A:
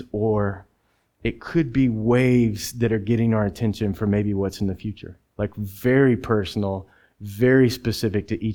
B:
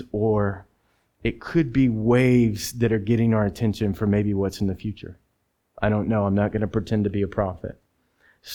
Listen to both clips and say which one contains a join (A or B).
A